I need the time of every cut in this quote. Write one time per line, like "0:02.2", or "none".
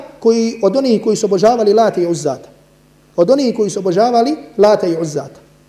none